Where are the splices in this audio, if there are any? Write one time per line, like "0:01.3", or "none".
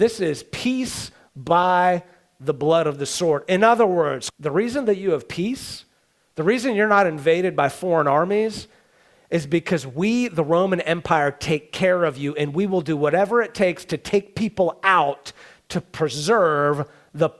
0:04.3